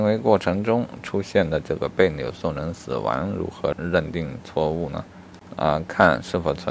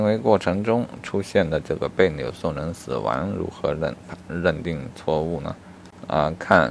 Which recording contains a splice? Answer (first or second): first